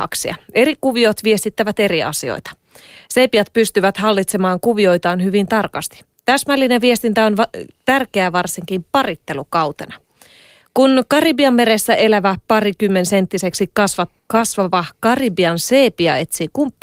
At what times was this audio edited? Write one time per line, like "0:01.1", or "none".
0:14.2

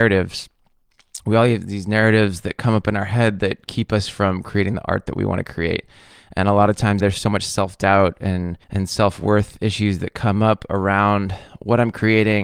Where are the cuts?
0:07.0
0:08.6

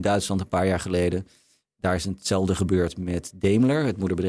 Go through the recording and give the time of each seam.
none

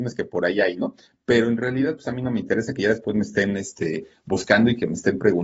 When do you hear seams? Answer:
none

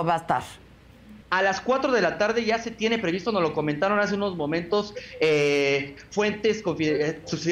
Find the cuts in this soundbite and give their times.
0:01.2

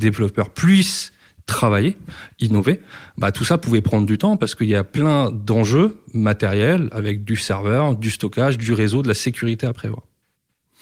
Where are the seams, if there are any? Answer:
none

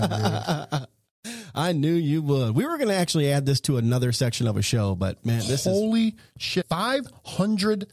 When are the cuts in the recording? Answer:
0:06.6

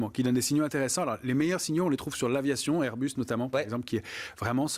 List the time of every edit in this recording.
none

